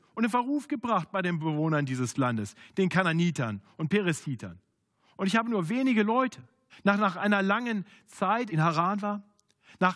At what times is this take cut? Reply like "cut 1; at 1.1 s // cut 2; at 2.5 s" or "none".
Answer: cut 1; at 6.7 s // cut 2; at 8.5 s